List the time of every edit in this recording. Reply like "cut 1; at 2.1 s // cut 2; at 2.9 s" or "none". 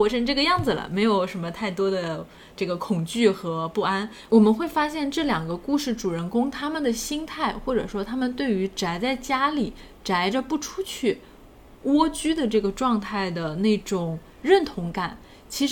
cut 1; at 4.3 s